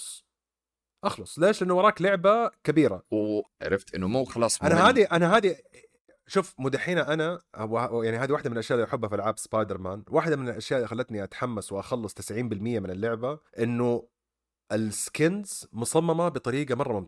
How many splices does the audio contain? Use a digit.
2